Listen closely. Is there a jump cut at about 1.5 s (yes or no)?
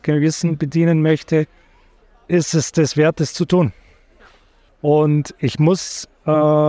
no